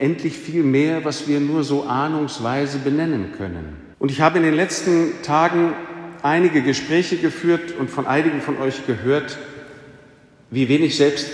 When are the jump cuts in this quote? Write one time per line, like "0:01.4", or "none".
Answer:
0:03.9